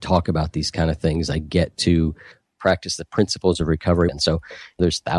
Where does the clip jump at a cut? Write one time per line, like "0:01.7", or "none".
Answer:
0:04.1